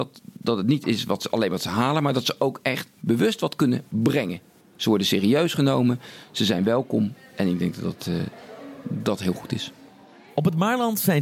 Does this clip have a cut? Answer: no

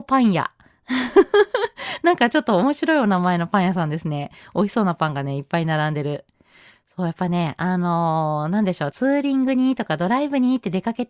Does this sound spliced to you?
yes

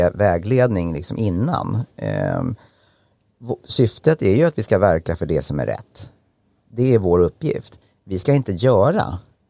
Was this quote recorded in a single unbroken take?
yes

